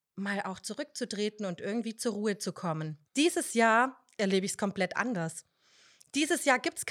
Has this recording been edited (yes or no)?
yes